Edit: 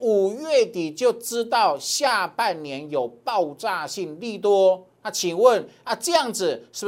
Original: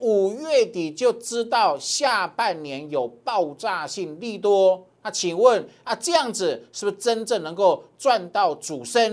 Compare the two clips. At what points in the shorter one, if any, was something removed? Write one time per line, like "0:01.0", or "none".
none